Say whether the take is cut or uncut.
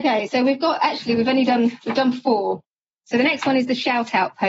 uncut